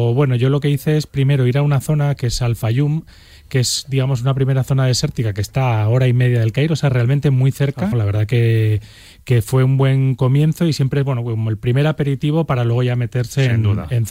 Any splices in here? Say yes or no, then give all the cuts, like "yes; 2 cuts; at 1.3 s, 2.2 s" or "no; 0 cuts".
yes; 1 cut; at 7.9 s